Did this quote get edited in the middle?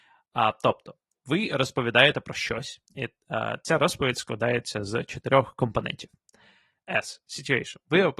no; 0 cuts

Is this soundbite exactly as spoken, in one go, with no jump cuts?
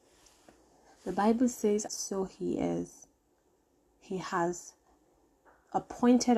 no; 2 cuts; at 1.9 s, 3.8 s

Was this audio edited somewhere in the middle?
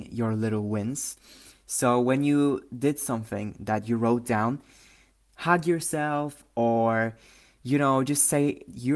no; 0 cuts

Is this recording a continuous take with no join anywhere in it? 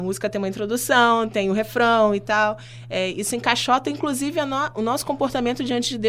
yes; 0 cuts

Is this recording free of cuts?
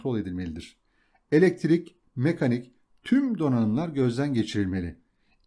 no; 1 cut; at 2.0 s

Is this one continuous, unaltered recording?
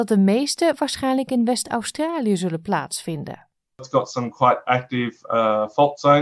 yes; 0 cuts

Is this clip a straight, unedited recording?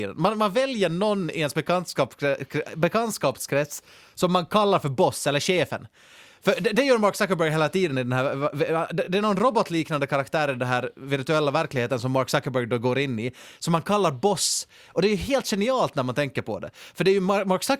yes; 0 cuts

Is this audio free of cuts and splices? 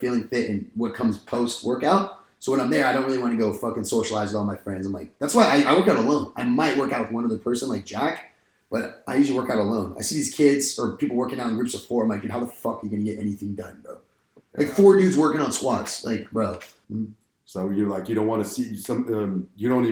no; 1 cut; at 16.8 s

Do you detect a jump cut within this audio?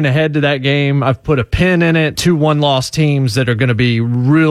yes; 1 cut; at 2.2 s

